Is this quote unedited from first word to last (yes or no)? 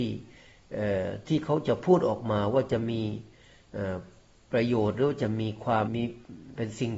no